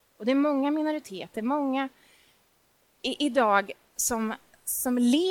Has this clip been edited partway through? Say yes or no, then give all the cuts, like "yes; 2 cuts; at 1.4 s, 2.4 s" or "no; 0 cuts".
no; 0 cuts